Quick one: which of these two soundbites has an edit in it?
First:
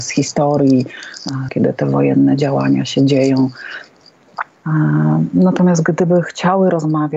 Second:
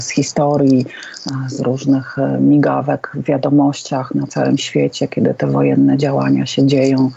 first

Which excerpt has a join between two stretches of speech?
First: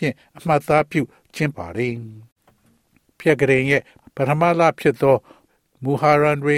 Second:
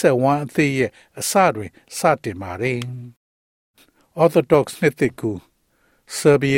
first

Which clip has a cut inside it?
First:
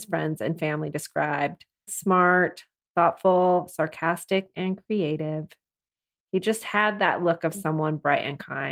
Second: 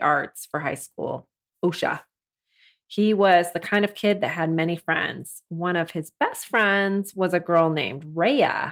first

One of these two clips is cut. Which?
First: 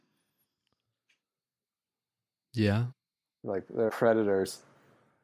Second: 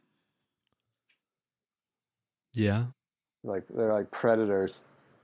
first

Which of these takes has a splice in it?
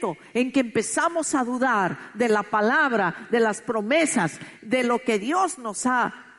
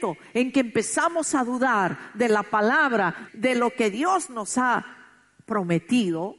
second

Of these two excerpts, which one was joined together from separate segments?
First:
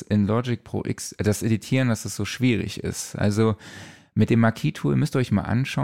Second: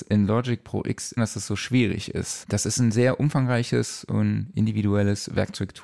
second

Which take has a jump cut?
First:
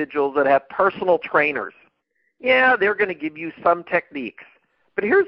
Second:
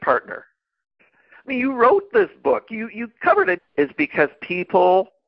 second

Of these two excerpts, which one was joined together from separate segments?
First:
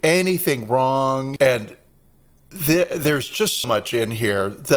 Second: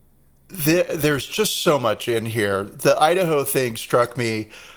first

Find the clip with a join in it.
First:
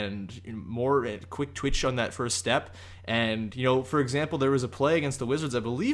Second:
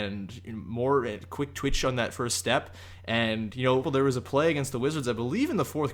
second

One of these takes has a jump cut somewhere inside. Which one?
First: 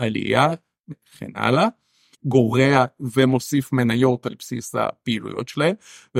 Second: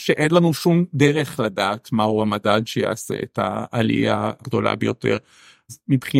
first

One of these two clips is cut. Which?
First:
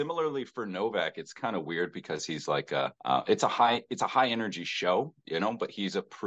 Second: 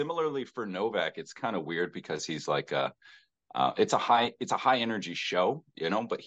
first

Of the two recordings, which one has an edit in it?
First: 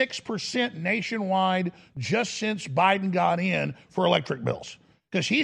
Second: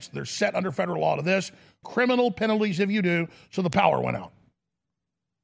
second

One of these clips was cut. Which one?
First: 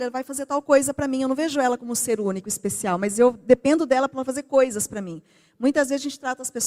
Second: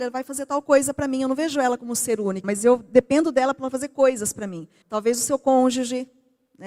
second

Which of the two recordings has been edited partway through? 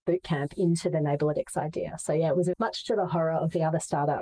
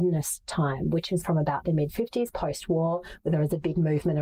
first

